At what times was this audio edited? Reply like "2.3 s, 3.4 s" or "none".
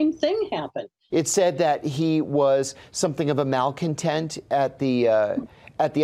1.1 s